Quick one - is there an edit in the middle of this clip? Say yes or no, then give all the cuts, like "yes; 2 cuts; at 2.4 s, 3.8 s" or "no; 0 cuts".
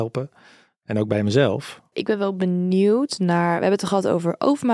yes; 1 cut; at 1.9 s